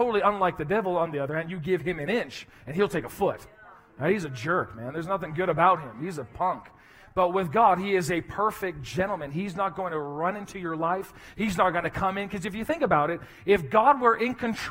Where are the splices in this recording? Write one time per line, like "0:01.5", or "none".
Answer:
none